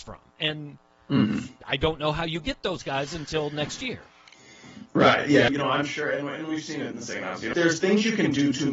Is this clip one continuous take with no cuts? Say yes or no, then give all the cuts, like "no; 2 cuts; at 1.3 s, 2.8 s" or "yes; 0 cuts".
no; 2 cuts; at 5.5 s, 7.5 s